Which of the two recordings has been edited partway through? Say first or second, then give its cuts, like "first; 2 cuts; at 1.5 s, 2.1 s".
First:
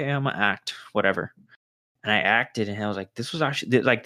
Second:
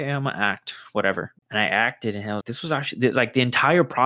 second; 2 cuts; at 1.4 s, 2.4 s